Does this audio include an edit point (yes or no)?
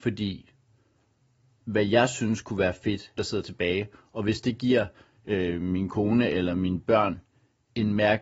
yes